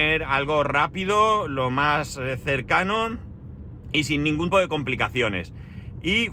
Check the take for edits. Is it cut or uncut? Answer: cut